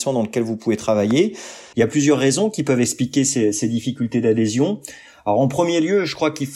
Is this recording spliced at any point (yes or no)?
yes